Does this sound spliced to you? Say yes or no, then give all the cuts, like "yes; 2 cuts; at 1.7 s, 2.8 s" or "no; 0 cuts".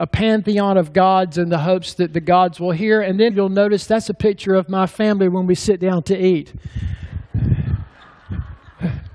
yes; 1 cut; at 3.3 s